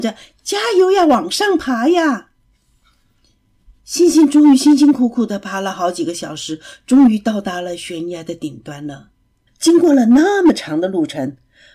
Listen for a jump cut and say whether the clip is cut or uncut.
cut